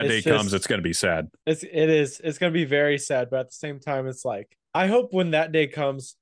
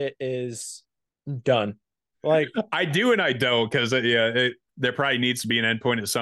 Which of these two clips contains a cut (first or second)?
second